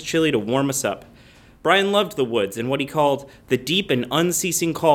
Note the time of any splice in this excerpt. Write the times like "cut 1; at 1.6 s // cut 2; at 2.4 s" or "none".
none